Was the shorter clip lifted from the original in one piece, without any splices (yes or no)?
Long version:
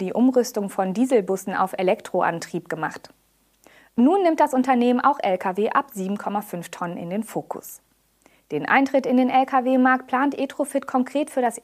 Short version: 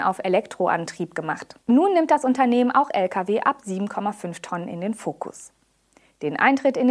no